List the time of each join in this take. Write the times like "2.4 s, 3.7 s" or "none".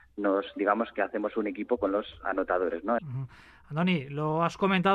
3.0 s